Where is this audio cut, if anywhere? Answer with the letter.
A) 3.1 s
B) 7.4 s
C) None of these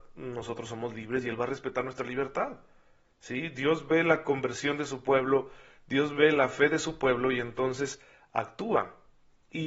A